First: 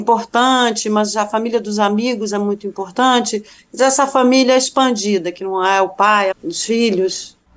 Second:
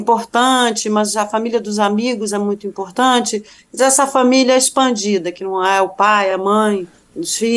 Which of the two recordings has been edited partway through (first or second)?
first